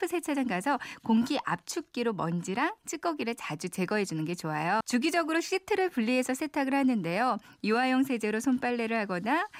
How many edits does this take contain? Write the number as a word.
one